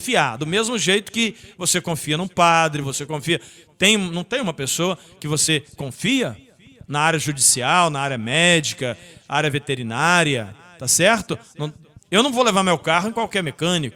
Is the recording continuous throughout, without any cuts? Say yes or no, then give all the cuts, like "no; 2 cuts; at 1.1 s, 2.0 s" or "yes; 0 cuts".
no; 2 cuts; at 2.8 s, 12.0 s